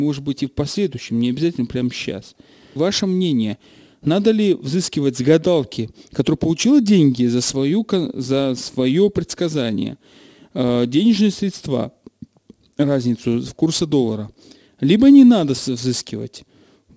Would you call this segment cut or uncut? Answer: cut